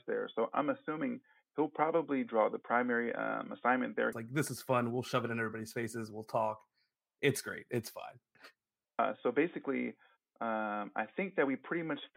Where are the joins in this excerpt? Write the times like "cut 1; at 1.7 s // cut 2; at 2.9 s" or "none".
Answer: cut 1; at 4.1 s // cut 2; at 8.8 s